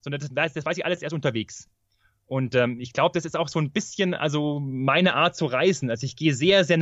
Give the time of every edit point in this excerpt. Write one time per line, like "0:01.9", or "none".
none